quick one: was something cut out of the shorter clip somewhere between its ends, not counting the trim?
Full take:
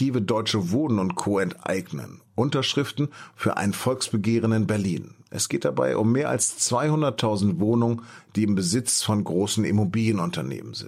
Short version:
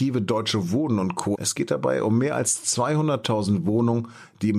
yes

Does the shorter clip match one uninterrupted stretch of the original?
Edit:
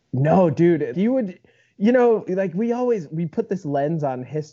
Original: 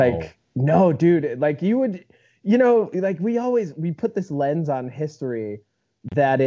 no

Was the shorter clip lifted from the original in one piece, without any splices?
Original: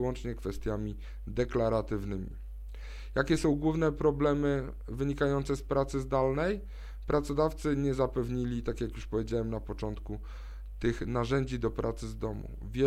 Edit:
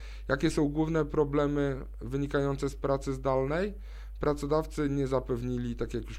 yes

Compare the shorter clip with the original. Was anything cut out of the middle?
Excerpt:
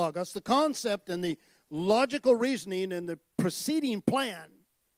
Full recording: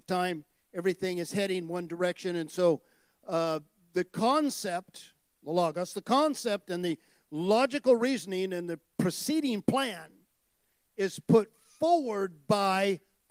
no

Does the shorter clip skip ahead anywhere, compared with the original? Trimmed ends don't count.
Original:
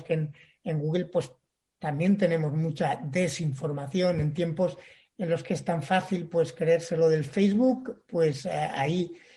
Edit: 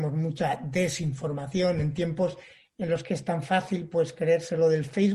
no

